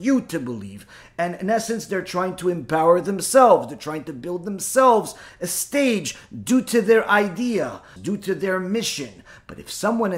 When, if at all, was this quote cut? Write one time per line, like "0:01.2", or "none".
0:08.0